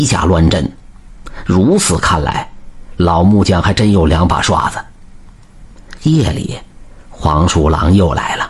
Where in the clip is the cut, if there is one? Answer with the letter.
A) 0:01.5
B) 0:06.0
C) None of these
C